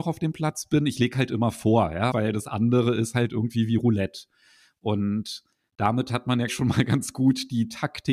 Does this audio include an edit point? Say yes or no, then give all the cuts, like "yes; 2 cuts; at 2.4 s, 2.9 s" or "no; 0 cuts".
yes; 2 cuts; at 2.1 s, 6.5 s